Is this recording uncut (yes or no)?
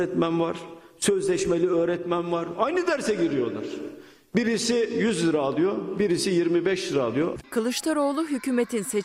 no